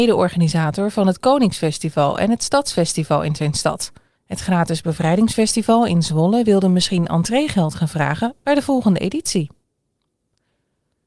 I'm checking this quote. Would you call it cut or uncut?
cut